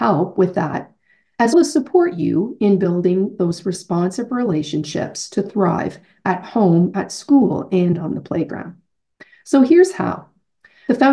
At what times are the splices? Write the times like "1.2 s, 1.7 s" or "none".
1.5 s